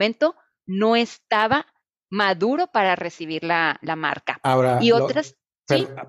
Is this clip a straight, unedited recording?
yes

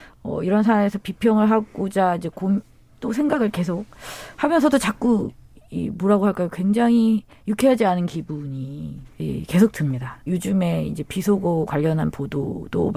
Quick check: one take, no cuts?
no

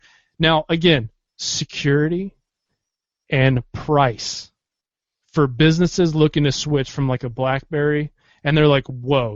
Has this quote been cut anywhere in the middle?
no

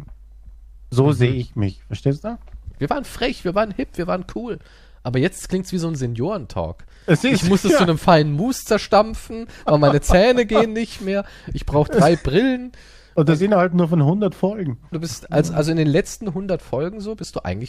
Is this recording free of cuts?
no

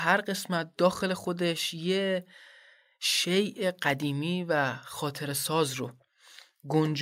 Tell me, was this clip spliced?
no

